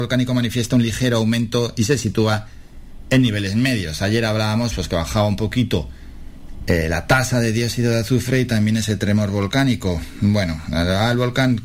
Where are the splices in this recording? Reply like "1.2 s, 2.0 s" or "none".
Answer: none